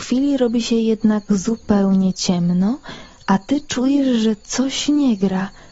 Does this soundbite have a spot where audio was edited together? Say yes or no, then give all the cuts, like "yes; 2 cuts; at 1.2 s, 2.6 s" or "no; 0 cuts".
no; 0 cuts